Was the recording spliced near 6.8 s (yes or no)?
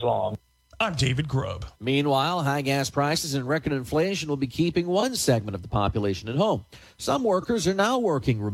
no